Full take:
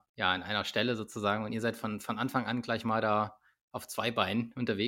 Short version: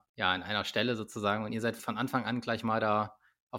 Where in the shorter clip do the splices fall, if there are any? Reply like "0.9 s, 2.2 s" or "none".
1.8 s